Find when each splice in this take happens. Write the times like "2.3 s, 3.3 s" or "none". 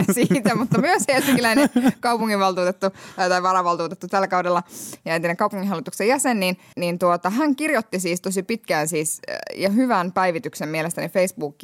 6.7 s